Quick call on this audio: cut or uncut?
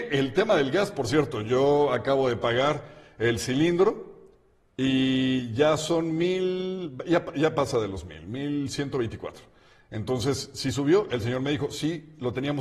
uncut